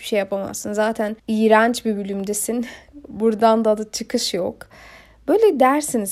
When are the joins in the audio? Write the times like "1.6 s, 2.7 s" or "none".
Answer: 1.2 s